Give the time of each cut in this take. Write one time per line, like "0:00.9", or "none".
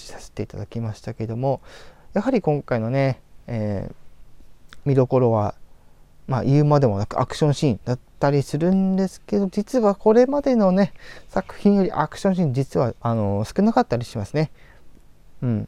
none